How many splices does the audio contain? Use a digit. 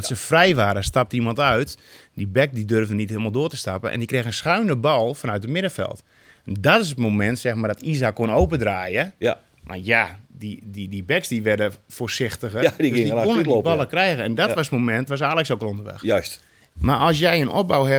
2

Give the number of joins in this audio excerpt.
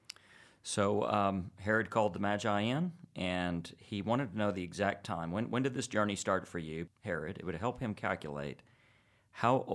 1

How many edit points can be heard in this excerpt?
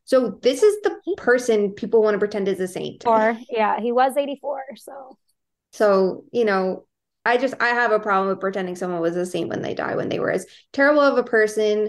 2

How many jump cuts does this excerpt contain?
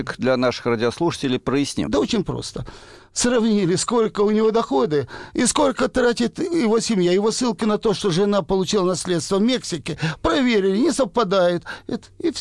1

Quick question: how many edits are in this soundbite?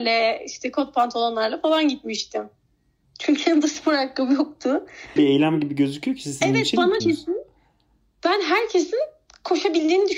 3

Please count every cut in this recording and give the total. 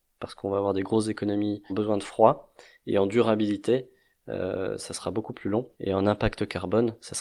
2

